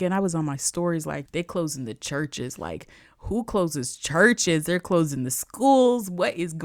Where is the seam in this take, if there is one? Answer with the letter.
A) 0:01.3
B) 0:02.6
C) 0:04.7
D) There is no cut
A